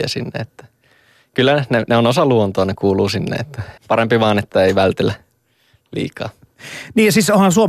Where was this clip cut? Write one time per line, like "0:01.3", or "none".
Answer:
0:03.8